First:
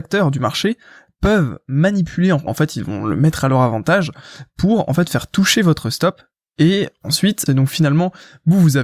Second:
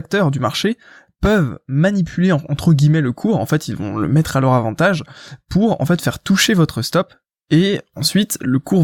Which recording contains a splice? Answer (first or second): first